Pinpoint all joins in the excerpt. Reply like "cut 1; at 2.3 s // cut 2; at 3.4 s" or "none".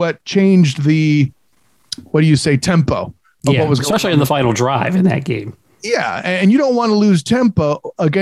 none